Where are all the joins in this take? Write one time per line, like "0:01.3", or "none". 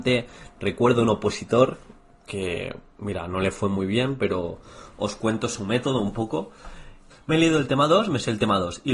0:07.1